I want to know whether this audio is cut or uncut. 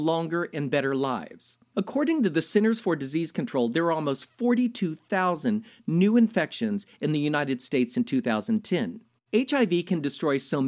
cut